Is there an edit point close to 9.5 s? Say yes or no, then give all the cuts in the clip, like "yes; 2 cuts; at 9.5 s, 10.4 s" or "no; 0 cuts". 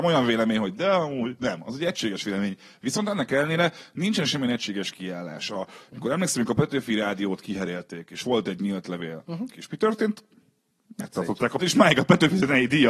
yes; 2 cuts; at 9.5 s, 11.6 s